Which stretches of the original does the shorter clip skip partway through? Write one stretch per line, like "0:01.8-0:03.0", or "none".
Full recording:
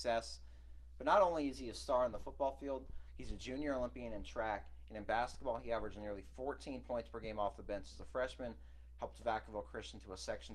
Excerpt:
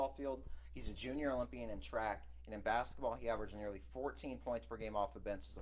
none